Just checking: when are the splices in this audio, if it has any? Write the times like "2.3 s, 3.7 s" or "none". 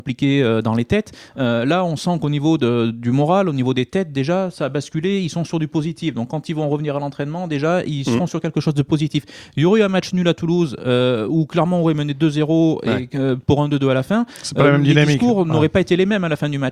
none